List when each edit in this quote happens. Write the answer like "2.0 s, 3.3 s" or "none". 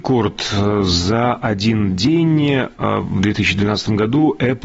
none